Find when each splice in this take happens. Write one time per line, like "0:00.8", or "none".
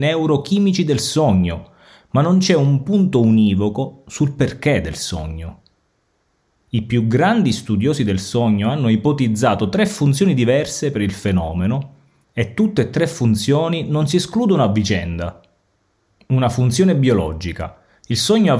none

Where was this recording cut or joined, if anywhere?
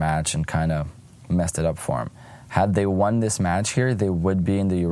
none

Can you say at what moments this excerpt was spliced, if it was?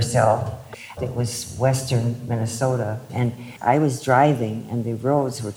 0:01.0

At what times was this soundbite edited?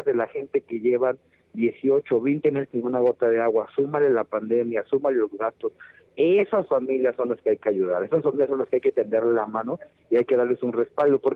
none

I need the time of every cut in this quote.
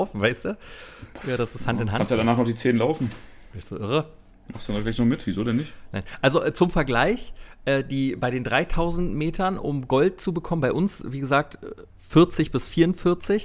none

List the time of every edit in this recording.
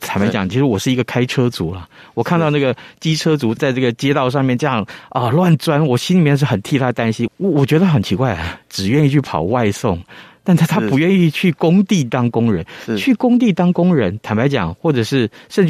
0:07.3
0:08.6

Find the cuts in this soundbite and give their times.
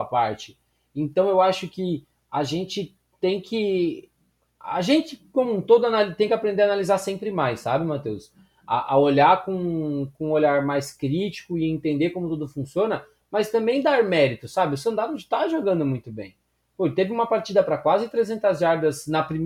none

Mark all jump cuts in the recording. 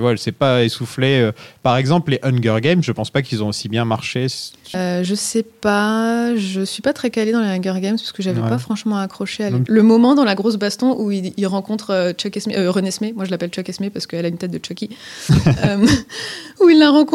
0:04.7
0:09.7

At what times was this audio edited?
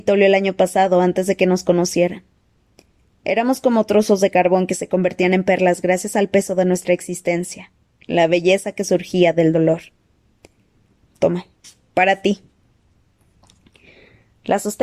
0:11.0

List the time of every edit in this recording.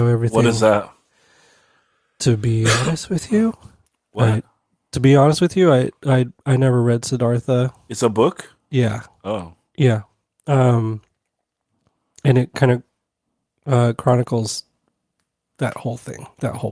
none

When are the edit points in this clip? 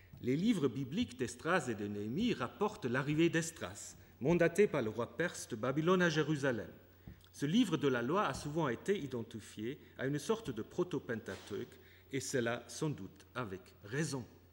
0:07.2

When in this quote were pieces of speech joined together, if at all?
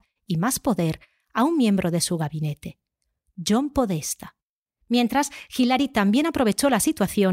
0:04.7

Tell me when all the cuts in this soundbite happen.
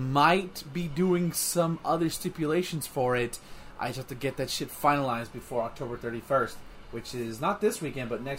none

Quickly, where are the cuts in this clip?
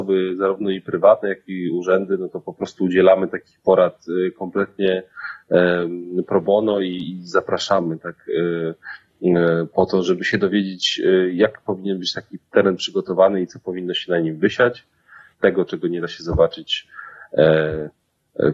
0:10.0
0:15.3

